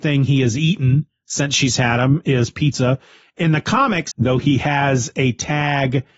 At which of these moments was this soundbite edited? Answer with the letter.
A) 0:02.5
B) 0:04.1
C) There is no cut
B